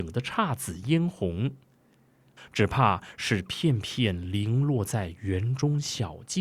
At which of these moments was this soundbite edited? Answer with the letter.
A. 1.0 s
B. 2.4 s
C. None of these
B